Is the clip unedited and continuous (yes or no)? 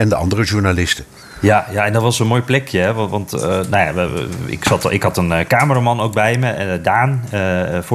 yes